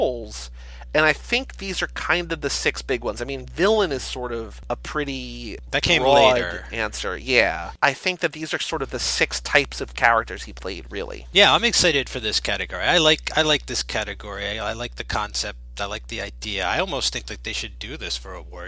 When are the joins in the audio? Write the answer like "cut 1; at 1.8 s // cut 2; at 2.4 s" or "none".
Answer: none